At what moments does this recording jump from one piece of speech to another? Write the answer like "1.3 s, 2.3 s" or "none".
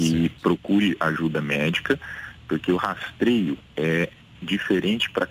3.7 s